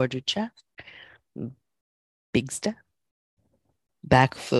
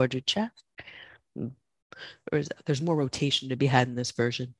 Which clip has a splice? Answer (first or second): second